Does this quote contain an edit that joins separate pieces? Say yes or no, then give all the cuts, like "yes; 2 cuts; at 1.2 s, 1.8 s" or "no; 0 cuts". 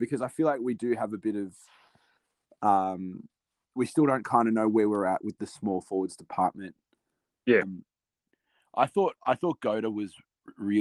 yes; 2 cuts; at 3.8 s, 7.6 s